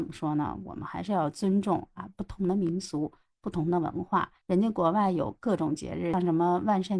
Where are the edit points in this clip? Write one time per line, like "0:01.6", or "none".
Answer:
0:04.4